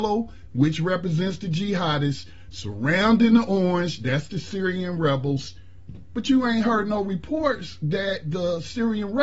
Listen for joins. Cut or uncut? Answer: uncut